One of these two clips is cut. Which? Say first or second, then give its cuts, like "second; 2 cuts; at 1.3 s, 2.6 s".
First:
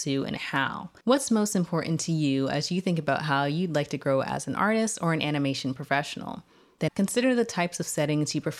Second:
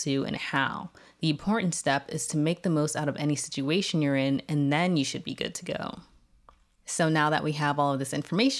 first; 2 cuts; at 1.0 s, 6.9 s